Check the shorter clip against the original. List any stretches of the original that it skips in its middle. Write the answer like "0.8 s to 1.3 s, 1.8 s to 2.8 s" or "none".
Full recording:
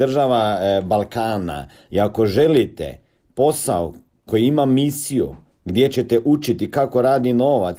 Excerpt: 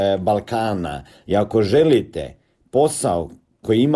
none